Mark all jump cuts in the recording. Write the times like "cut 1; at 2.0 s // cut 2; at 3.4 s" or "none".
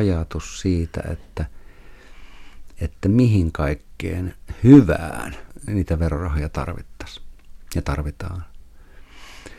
none